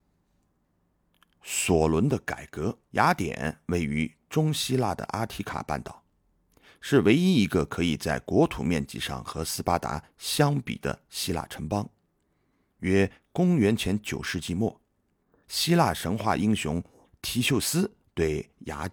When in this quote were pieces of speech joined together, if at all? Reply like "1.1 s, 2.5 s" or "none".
2.8 s